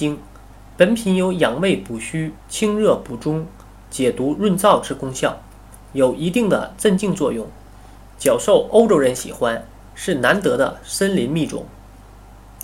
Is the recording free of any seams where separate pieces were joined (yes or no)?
yes